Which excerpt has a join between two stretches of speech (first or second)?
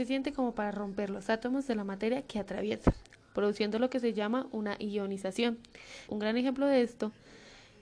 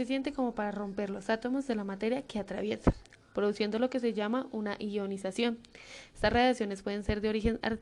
first